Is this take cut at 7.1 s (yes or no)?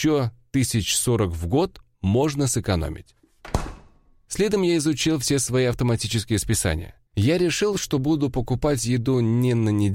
yes